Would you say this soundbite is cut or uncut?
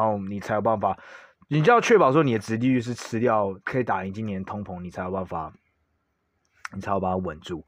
uncut